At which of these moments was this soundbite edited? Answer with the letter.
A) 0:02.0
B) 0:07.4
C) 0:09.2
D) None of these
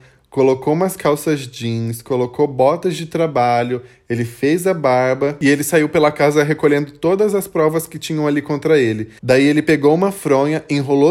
C